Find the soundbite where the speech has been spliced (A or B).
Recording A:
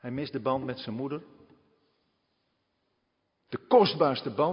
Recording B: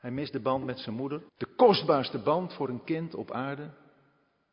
B